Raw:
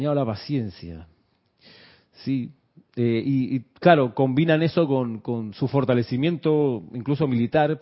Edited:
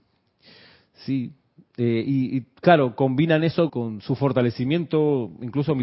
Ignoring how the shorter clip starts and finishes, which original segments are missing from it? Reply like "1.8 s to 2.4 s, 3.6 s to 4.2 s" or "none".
4.9 s to 5.2 s